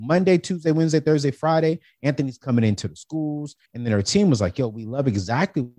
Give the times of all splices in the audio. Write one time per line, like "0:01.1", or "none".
0:03.7